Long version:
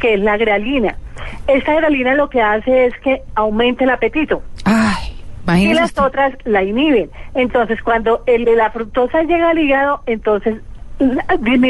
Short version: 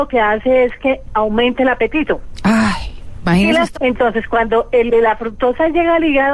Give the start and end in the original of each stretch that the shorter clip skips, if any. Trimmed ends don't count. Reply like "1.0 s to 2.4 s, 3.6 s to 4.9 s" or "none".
6.0 s to 7.3 s